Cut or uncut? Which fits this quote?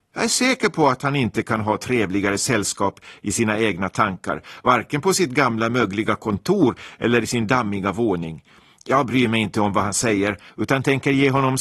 uncut